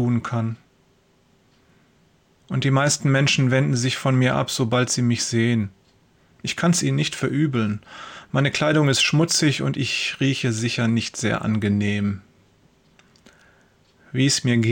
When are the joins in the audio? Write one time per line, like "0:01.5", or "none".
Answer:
0:02.4